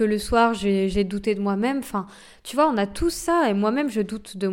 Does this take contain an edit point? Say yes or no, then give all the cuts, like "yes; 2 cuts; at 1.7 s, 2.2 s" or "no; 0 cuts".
no; 0 cuts